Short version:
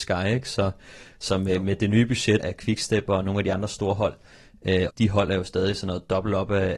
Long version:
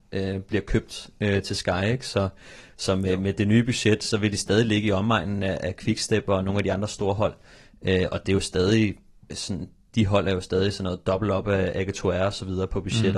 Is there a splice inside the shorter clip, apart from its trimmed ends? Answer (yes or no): yes